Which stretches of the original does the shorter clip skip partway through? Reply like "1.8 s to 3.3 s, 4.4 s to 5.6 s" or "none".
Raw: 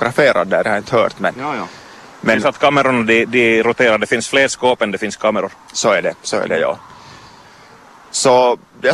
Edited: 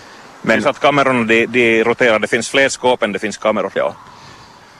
5.5 s to 6.6 s